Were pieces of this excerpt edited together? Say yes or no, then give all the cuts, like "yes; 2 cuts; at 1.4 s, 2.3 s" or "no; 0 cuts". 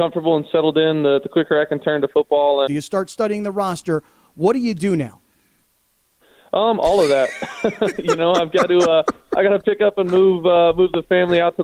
yes; 1 cut; at 2.7 s